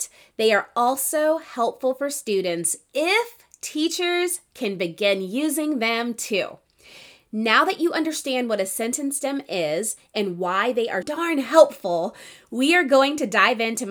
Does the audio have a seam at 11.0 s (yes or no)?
yes